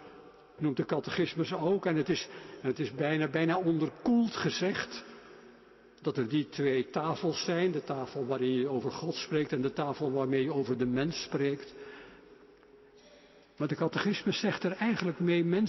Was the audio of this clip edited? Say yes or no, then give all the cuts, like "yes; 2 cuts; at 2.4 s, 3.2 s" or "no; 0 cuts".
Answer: no; 0 cuts